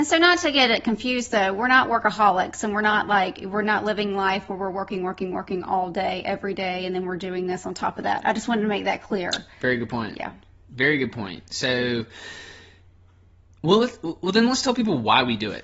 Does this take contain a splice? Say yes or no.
no